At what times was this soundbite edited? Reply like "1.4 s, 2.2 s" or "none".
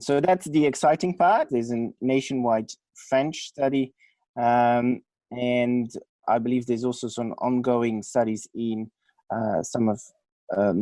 1.5 s, 6.2 s

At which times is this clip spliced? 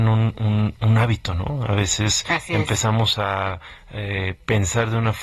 none

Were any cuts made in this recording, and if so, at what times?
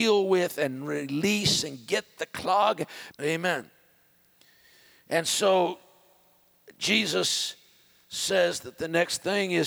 3.1 s

